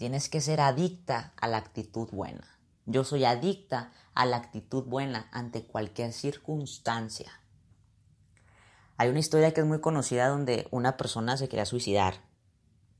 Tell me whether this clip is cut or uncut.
uncut